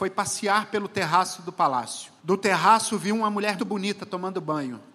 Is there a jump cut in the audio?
yes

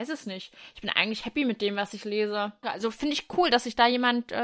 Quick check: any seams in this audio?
yes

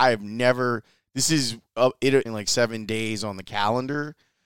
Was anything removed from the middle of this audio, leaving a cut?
yes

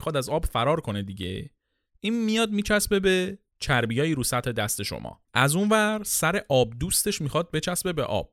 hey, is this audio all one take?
no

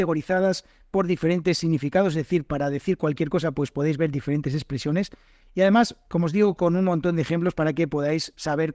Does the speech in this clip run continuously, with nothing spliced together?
yes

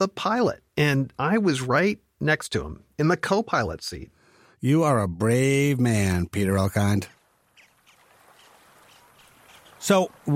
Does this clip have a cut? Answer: no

